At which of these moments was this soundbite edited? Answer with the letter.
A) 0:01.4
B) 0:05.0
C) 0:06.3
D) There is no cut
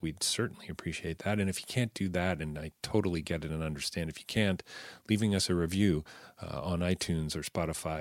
D